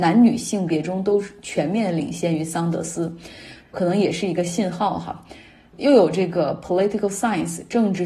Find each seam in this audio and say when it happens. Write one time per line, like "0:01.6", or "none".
0:03.6